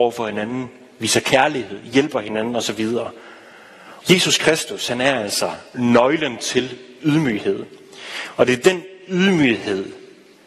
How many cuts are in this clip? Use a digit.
1